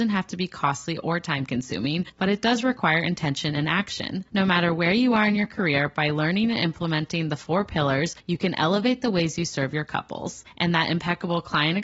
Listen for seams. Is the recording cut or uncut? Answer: uncut